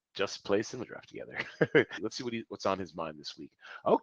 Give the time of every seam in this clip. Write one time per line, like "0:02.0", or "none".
0:02.0